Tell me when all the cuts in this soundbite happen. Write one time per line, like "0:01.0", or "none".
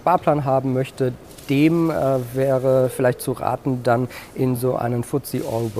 none